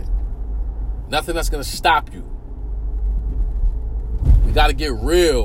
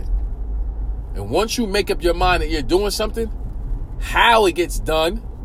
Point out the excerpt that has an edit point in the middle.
first; 1 cut; at 1.1 s

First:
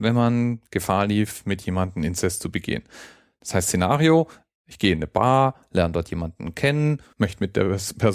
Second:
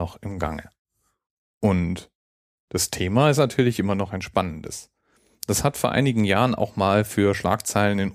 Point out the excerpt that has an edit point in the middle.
first; 1 cut; at 7.1 s

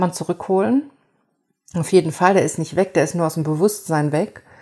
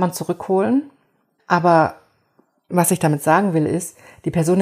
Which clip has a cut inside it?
second; 1 cut; at 1.4 s

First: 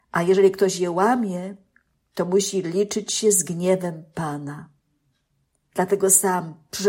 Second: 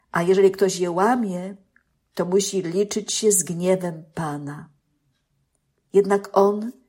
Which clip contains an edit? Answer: first; 1 cut; at 5.6 s

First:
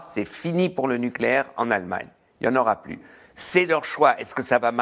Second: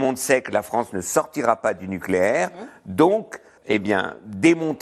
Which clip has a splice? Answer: second; 1 cut; at 3.6 s

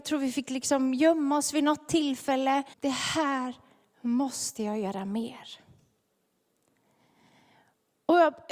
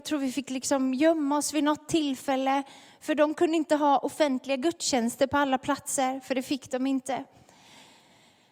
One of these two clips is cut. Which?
first; 1 cut; at 2.7 s

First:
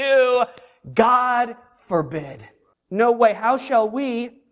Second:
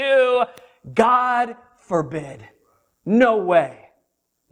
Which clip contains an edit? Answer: first; 1 cut; at 2.7 s

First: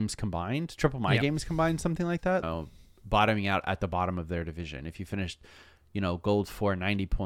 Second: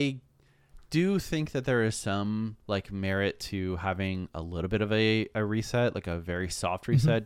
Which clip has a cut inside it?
first; 1 cut; at 2.4 s

